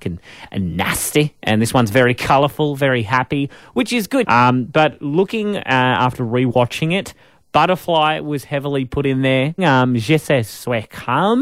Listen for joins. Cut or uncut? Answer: cut